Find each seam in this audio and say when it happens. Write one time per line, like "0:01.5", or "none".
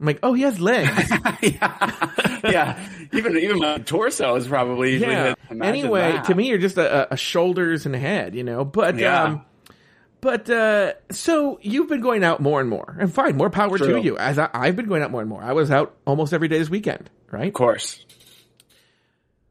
0:05.3

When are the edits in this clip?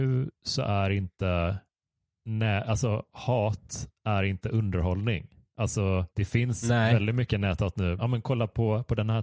0:06.1
0:08.0

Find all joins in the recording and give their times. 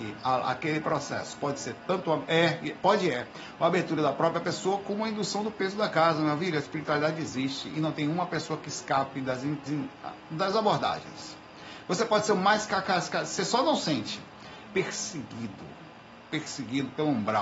0:09.7
0:14.7

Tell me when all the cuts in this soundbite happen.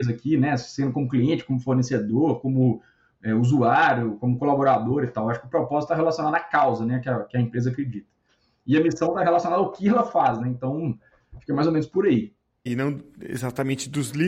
0:12.7

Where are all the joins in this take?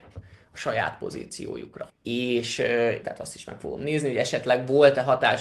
0:01.9
0:03.0

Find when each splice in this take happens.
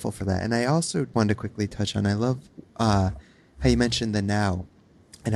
0:01.1

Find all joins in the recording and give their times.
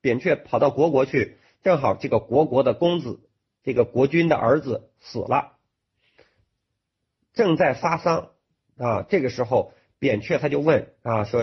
none

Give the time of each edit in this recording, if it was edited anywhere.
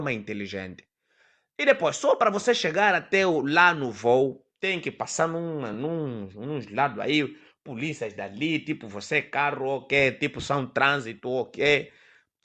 none

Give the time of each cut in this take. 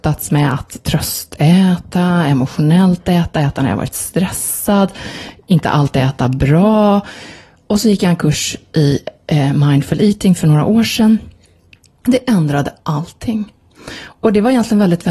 none

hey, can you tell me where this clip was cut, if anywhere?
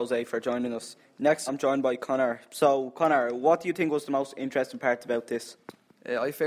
0:01.5

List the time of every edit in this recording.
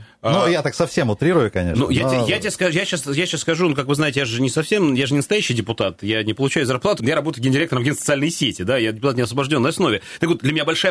0:07.0

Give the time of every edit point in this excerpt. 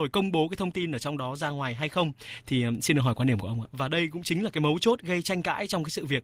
0:03.7

